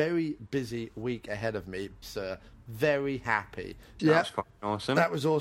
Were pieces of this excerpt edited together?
yes; 2 cuts; at 2.0 s, 4.0 s

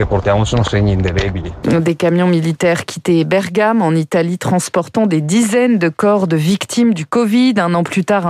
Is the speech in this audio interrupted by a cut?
yes; 1 cut; at 1.6 s

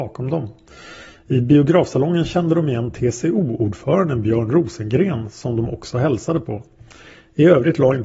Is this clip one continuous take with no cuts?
yes; 0 cuts

